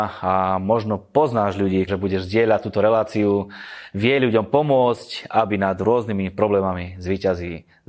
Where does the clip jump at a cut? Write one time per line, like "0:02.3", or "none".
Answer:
0:01.9

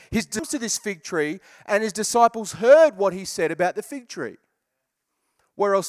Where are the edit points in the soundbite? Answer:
none

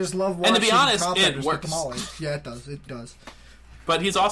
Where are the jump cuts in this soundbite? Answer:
0:02.9

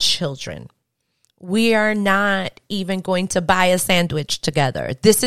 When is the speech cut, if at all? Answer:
0:01.3

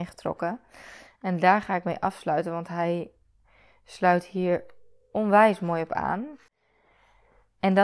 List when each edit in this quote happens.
none

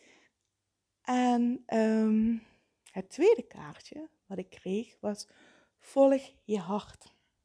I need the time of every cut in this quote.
none

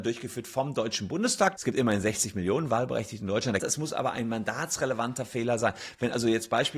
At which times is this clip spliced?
0:01.6
0:03.6

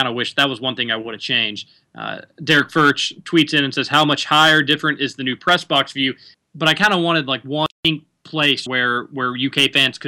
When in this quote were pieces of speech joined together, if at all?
0:06.3
0:08.7

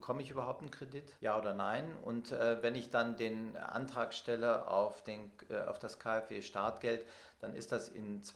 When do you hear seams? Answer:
0:01.2

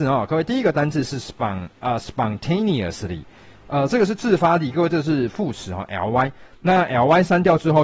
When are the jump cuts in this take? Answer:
none

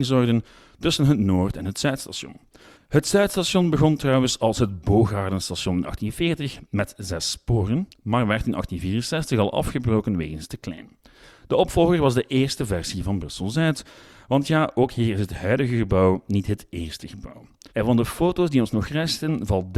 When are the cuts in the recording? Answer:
0:02.7
0:17.7

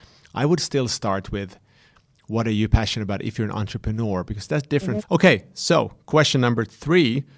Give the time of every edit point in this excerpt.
0:05.0

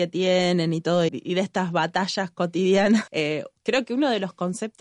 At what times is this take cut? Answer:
0:01.1
0:03.1

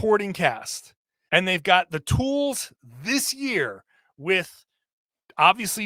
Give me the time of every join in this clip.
0:01.3

